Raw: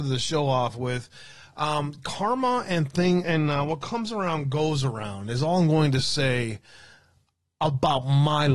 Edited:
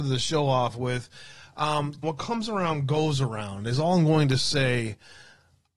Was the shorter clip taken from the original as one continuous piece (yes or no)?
no